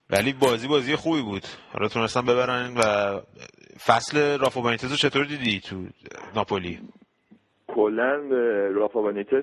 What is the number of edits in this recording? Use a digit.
0